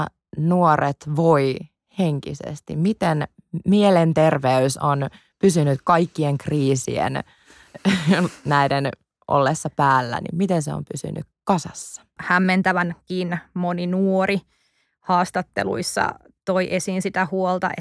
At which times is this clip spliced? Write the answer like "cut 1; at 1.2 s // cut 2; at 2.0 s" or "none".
cut 1; at 12.2 s